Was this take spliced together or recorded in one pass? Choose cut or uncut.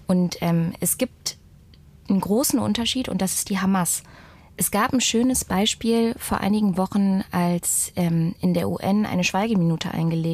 uncut